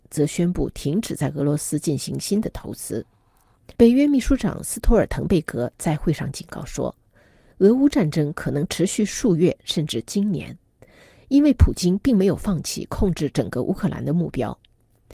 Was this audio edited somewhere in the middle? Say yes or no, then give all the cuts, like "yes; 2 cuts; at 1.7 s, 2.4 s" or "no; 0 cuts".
yes; 1 cut; at 3.8 s